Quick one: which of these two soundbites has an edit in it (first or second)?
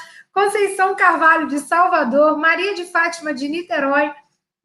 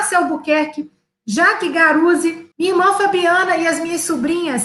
second